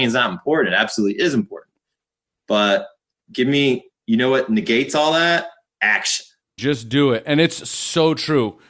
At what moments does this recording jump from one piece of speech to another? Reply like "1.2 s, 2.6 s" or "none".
6.6 s